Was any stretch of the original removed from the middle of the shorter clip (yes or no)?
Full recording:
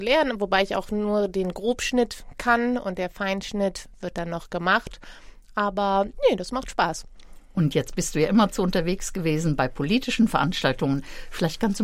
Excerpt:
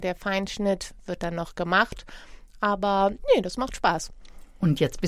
no